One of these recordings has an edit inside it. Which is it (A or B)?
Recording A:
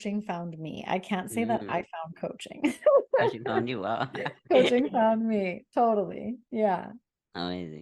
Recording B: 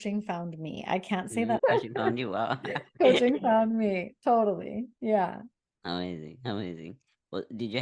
B